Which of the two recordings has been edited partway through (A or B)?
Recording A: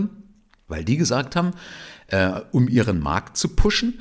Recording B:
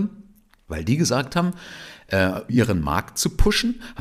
B